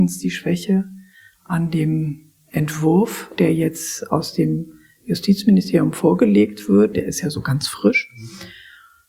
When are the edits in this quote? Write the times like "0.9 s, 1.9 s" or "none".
6.9 s

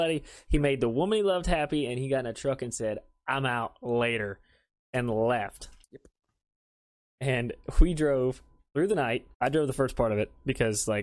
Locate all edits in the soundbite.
5.8 s, 9.3 s

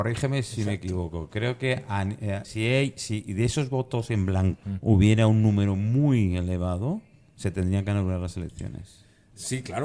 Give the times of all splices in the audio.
2.4 s, 4.6 s

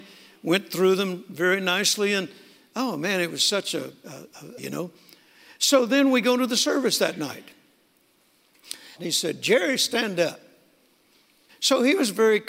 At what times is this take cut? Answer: 4.6 s, 8.9 s, 11.5 s

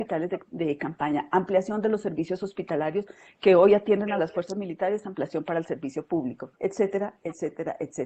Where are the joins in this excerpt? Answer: 6.5 s

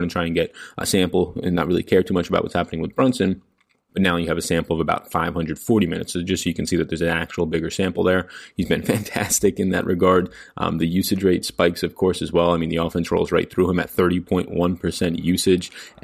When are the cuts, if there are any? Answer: 3.9 s

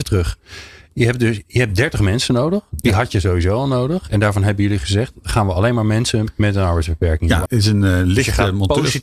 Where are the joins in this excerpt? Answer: 7.5 s

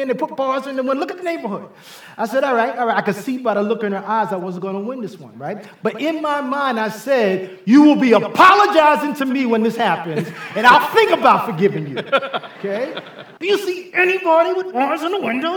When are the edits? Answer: 13.4 s

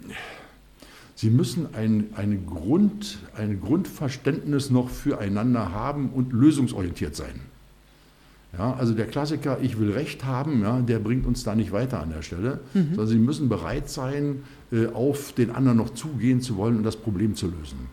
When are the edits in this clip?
none

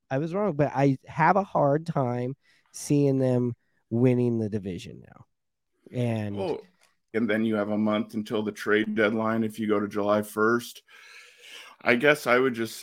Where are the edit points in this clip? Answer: 7.1 s, 11.7 s

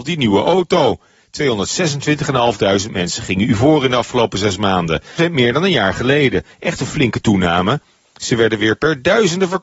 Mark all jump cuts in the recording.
5.2 s

